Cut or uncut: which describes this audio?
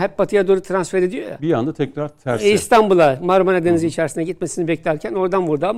uncut